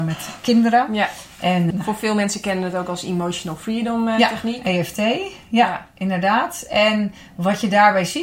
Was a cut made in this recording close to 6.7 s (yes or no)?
no